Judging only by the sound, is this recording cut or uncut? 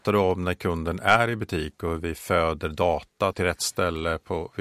cut